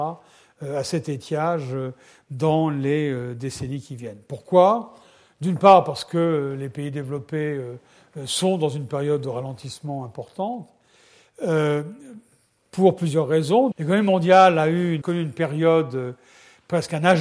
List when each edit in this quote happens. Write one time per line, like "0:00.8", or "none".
0:13.7
0:15.0